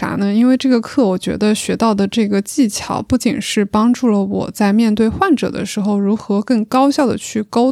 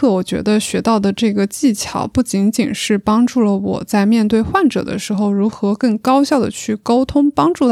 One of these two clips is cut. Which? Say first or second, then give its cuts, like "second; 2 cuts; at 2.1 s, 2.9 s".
first; 1 cut; at 3.2 s